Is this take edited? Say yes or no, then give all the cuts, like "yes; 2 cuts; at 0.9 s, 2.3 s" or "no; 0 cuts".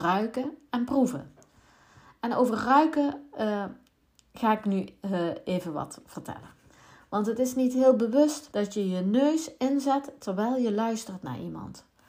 yes; 1 cut; at 8.5 s